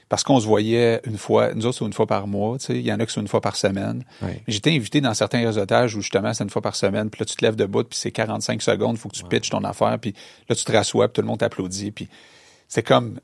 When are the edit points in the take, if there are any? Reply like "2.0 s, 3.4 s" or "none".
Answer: none